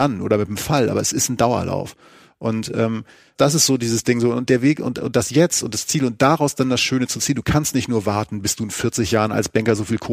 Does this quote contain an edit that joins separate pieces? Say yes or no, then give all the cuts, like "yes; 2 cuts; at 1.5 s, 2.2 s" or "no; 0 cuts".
no; 0 cuts